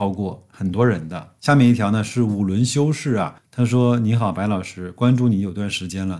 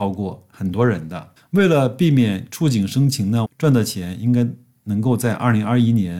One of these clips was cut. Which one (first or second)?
second